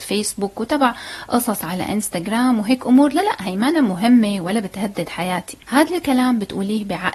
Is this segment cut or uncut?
cut